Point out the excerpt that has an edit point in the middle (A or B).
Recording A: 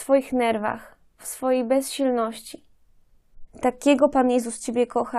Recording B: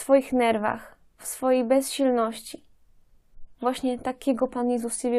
A